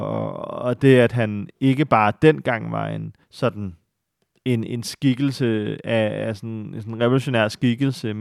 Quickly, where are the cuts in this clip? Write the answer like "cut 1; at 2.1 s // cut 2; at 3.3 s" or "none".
cut 1; at 3.2 s